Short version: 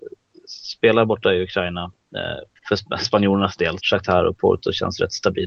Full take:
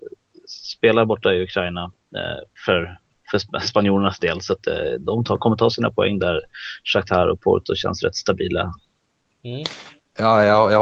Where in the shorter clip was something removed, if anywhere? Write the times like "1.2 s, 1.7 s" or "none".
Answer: 2.6 s, 3.8 s